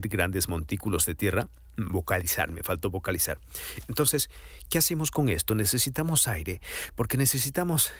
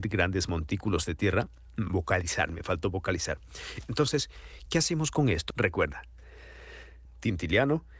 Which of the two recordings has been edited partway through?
second; 2 cuts; at 5.5 s, 7.1 s

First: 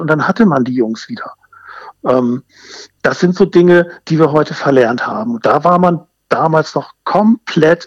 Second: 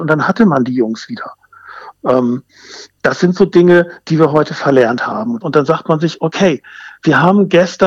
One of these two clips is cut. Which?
second; 1 cut; at 5.4 s

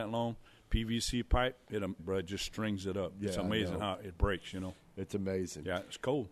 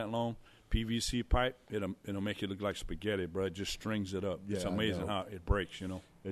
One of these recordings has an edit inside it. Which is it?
first; 1 cut; at 2.0 s

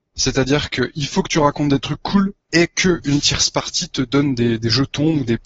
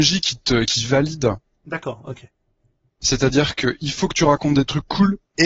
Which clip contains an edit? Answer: second; 1 cut; at 2.9 s

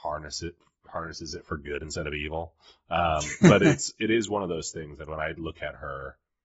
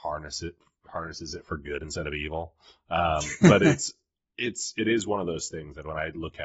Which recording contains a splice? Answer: first; 1 cut; at 4.0 s

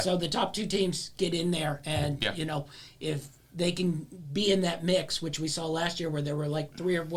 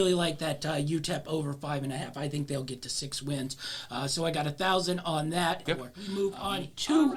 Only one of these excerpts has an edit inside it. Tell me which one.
second; 1 cut; at 5.7 s

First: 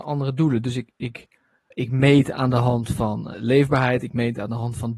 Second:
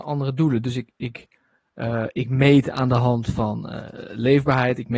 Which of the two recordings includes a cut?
first; 2 cuts; at 1.7 s, 3.3 s

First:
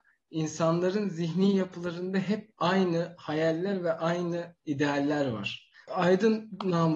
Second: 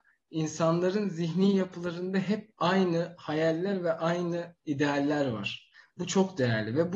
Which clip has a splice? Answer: first; 1 cut; at 5.9 s

